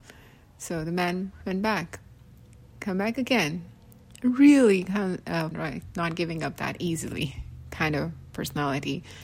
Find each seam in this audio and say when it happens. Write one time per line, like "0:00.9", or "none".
0:05.5